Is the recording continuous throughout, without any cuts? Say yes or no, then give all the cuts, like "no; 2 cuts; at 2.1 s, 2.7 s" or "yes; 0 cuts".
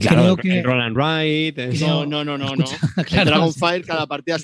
yes; 0 cuts